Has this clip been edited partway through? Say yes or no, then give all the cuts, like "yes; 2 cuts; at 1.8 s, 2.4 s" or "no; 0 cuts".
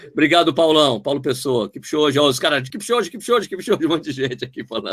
no; 0 cuts